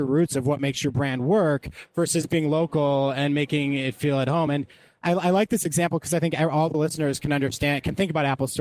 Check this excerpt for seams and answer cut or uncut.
uncut